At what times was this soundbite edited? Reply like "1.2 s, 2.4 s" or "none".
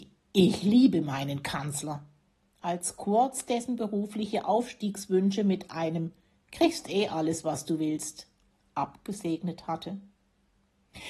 none